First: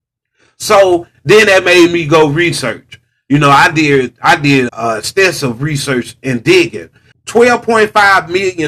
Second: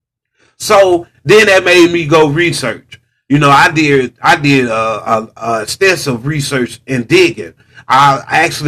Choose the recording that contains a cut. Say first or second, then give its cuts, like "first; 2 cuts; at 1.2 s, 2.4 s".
first; 2 cuts; at 4.7 s, 7.1 s